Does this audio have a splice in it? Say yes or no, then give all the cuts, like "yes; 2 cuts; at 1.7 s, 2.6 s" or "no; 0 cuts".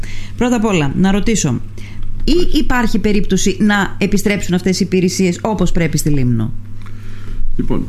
yes; 1 cut; at 2.2 s